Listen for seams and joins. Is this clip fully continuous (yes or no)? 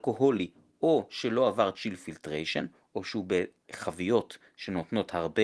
yes